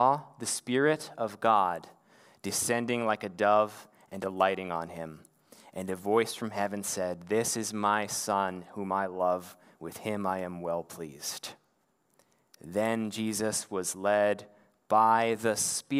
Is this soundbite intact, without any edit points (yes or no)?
yes